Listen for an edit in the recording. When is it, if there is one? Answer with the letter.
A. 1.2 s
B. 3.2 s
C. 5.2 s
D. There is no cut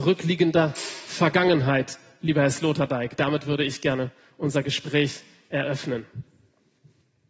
D